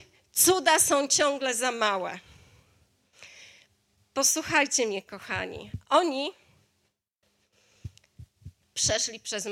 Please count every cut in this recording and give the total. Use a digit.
1